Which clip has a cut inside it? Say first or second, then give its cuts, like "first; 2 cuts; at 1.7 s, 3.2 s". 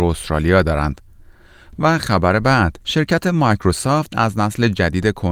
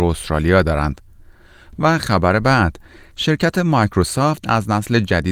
first; 1 cut; at 2.8 s